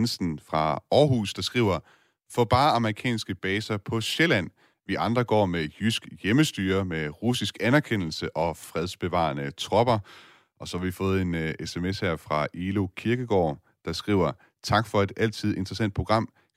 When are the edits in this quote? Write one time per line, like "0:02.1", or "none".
none